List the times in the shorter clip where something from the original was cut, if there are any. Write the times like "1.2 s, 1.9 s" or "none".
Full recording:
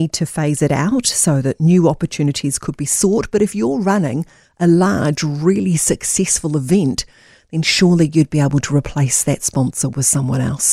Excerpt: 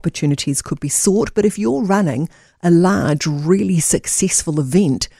none